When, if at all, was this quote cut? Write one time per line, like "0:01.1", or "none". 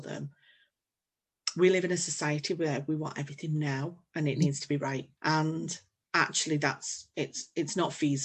0:05.2